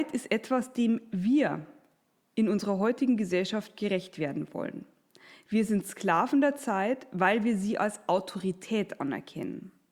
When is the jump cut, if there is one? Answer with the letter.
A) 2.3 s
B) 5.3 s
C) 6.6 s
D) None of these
D